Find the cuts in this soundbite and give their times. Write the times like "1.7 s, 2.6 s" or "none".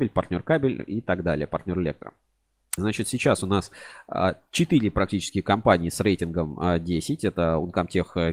2.8 s